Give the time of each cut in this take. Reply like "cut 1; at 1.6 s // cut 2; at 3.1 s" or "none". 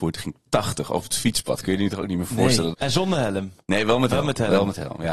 cut 1; at 2.7 s